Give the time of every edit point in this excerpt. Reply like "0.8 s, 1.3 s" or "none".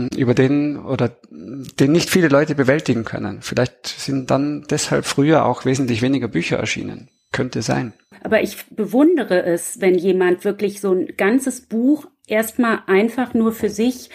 none